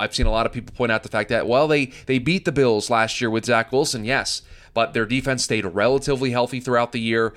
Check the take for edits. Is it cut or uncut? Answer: uncut